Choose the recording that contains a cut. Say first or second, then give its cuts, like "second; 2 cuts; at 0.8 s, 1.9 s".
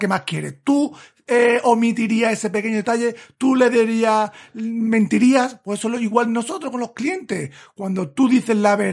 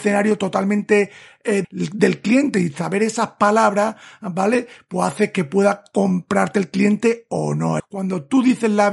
second; 2 cuts; at 1.6 s, 7.8 s